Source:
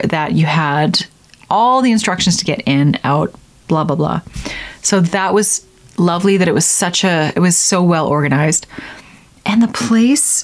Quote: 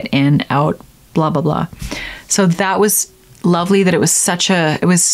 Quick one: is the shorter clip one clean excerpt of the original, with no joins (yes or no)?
yes